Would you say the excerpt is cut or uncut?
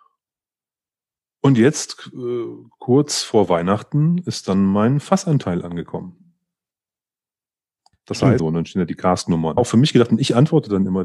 cut